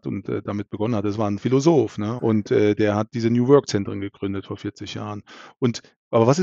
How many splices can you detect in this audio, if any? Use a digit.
1